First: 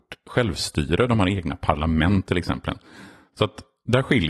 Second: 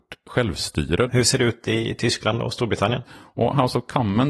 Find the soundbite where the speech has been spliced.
second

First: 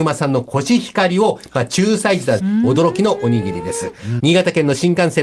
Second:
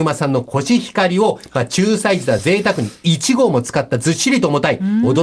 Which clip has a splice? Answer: first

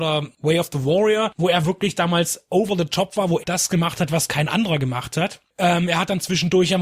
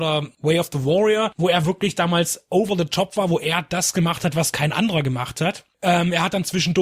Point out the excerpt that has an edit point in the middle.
first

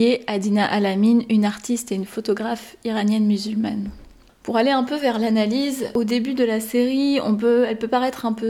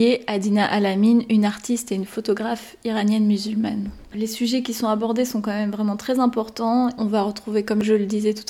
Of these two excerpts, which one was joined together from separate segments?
second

